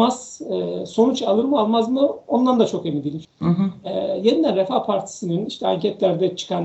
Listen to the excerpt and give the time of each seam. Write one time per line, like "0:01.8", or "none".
0:03.2